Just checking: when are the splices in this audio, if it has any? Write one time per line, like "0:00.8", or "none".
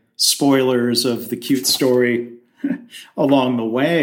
none